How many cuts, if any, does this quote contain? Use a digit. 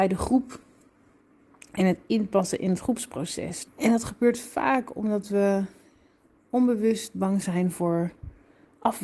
1